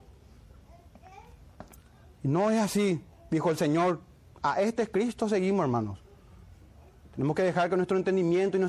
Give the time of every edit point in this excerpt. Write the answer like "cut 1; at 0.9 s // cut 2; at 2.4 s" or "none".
none